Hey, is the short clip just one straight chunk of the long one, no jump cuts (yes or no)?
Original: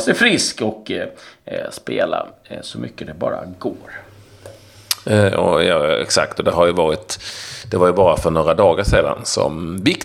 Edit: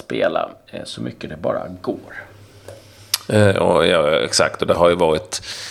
yes